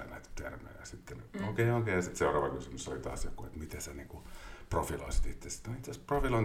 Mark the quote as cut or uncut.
uncut